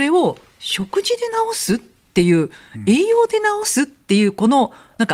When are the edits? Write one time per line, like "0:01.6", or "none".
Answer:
none